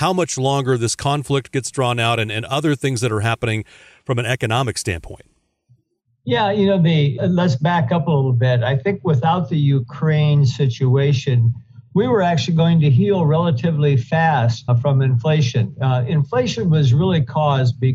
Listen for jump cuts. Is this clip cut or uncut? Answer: cut